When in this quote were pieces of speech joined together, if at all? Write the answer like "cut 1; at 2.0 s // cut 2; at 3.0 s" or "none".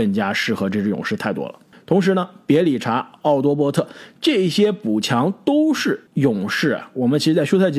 cut 1; at 1.7 s // cut 2; at 6.1 s